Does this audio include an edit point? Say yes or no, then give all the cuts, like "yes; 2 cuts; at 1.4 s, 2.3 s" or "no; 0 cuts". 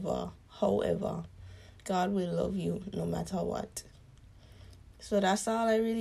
yes; 1 cut; at 4.9 s